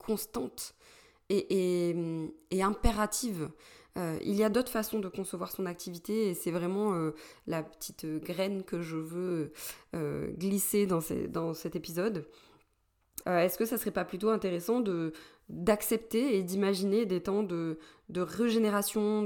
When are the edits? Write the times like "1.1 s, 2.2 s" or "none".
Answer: 13.2 s